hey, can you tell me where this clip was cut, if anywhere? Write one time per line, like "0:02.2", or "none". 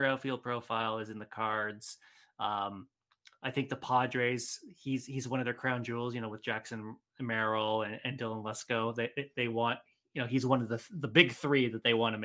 none